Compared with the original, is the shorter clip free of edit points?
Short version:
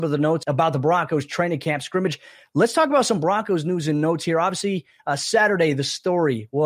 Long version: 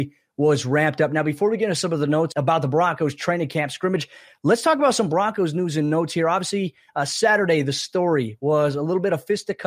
yes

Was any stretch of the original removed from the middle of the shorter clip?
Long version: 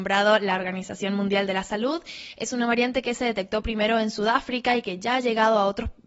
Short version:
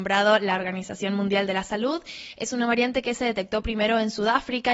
no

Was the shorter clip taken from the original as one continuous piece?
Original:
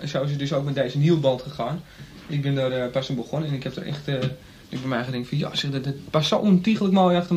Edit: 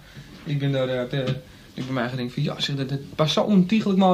no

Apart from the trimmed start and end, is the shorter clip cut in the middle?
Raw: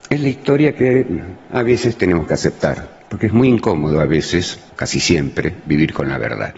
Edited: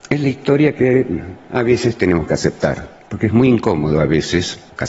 no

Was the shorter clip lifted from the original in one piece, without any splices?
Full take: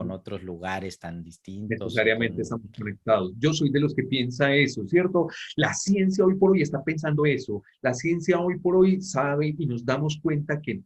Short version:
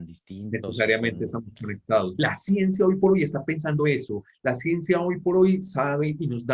no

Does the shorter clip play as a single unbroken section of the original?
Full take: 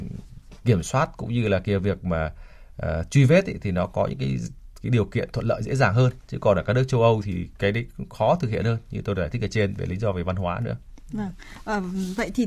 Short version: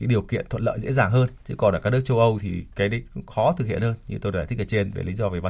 yes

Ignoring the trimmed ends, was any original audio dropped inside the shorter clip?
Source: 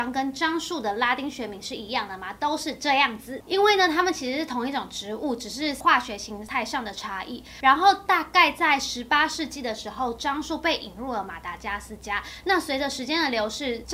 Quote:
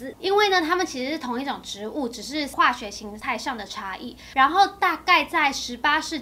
no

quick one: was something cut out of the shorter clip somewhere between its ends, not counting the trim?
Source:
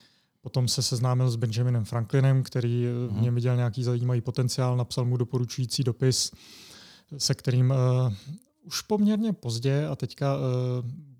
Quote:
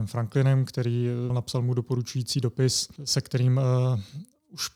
yes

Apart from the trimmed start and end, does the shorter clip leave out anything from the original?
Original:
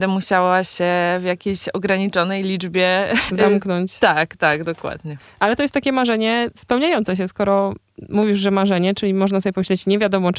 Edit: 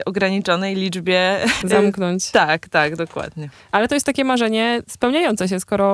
no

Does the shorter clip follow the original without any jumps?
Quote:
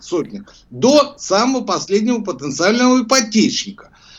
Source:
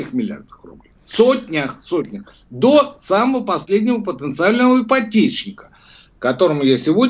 yes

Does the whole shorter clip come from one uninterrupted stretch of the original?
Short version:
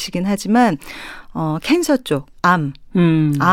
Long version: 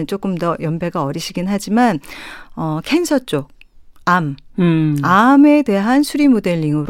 no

